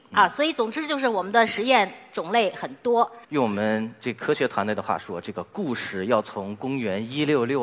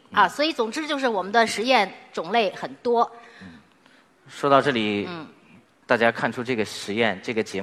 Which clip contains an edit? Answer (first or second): first